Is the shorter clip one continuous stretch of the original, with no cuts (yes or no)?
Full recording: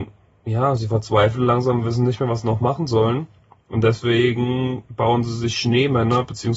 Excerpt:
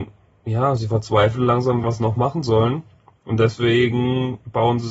no